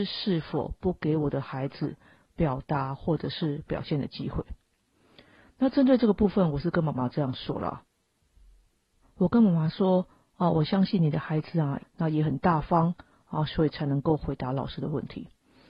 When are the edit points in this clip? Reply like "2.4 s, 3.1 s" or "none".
11.8 s, 13.5 s